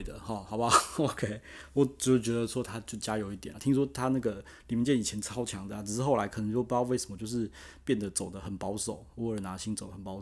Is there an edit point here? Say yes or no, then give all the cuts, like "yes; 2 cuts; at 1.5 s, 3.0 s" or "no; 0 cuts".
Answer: no; 0 cuts